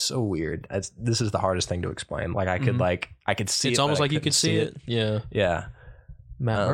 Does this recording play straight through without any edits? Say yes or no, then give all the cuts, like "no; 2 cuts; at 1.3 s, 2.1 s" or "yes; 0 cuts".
no; 1 cut; at 2.3 s